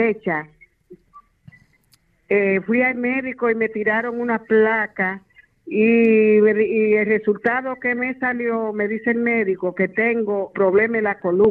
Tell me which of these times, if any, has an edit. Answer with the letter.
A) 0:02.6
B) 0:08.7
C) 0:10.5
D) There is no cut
C